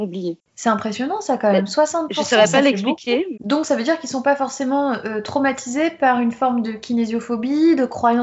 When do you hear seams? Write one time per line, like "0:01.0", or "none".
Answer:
0:03.3